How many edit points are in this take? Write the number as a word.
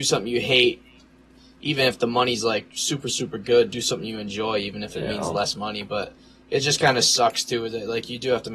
zero